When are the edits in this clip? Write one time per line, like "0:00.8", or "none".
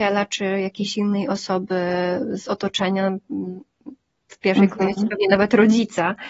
none